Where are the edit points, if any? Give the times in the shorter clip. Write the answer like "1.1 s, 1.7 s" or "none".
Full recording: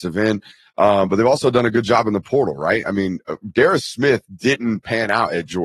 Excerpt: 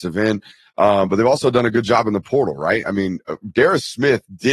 none